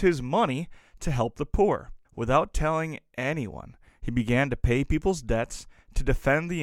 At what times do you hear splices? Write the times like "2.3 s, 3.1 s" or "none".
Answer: 2.0 s